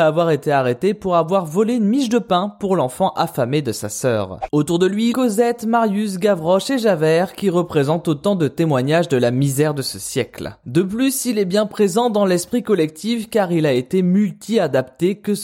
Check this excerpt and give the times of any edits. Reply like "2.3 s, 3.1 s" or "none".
5.1 s, 10.6 s